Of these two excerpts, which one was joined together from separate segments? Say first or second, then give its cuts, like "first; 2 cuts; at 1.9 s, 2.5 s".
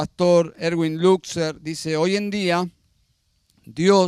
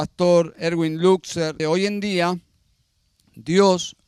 second; 1 cut; at 1.6 s